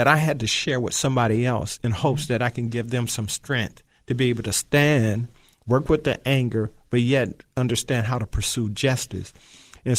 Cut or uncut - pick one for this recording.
uncut